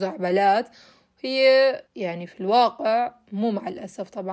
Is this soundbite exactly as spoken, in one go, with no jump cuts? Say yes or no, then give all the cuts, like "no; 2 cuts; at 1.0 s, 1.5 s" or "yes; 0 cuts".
no; 1 cut; at 1.9 s